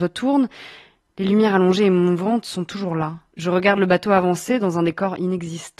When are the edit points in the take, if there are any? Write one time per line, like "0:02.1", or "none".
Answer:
0:03.3

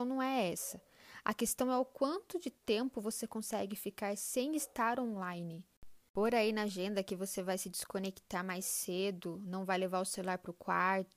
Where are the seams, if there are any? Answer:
0:06.0

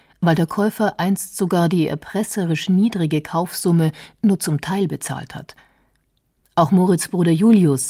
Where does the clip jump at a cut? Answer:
none

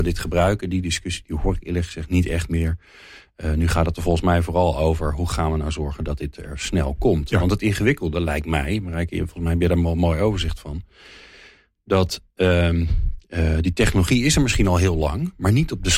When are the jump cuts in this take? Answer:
none

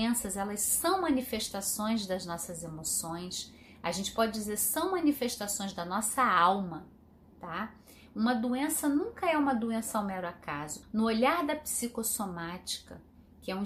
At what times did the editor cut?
0:10.8

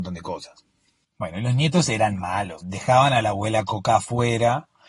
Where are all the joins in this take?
0:01.0
0:02.6

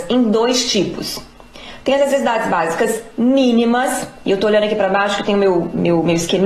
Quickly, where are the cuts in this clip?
none

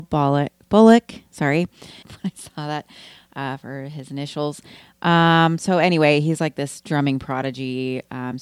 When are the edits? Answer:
0:02.0

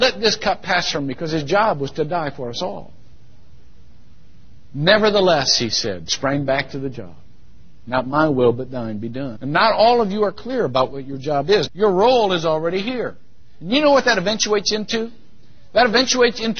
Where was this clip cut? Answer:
0:09.4
0:11.7
0:13.6

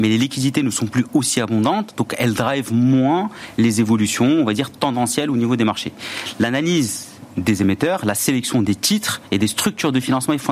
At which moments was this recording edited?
none

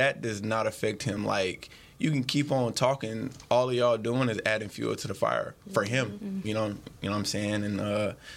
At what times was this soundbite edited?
none

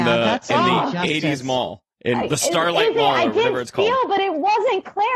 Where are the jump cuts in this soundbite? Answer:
none

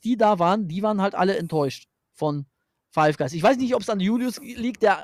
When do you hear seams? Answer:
none

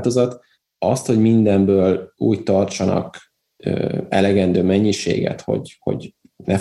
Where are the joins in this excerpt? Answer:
none

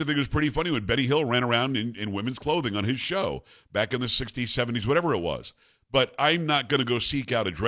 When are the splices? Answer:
none

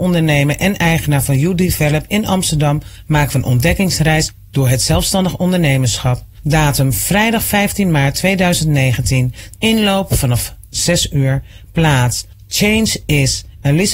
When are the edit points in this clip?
0:09.5

